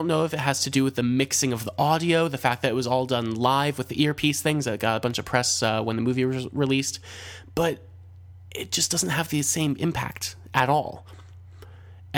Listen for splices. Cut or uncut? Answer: uncut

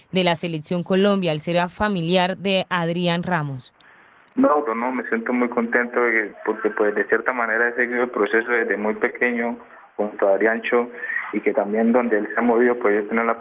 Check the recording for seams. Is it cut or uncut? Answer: cut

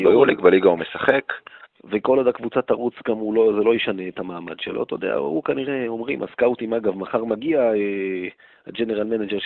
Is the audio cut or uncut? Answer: cut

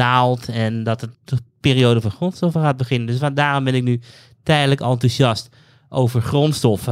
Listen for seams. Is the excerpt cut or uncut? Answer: cut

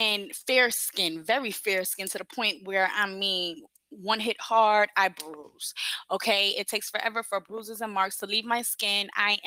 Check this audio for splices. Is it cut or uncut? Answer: uncut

